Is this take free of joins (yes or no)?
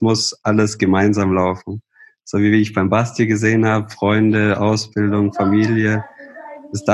yes